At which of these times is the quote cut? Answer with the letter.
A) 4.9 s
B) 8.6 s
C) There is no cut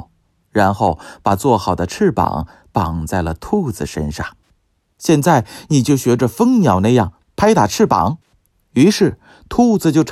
A